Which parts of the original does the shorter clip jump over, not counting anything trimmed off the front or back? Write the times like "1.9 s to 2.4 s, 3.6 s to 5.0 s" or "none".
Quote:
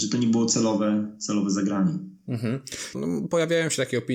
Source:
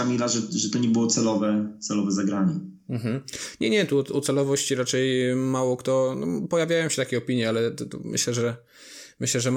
3.6 s to 6.1 s